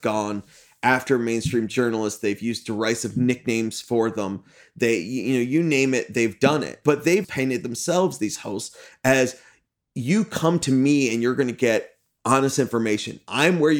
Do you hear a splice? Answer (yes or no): yes